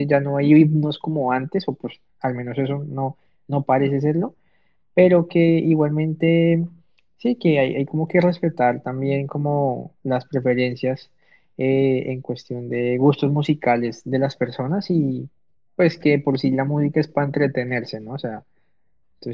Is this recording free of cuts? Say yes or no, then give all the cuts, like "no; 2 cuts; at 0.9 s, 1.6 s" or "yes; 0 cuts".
yes; 0 cuts